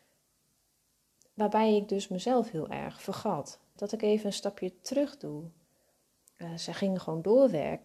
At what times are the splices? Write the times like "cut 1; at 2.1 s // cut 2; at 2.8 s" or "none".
cut 1; at 3.8 s // cut 2; at 6.4 s